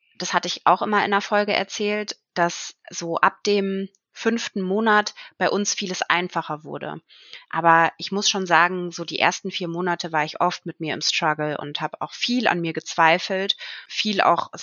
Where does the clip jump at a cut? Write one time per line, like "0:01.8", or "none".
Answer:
0:07.4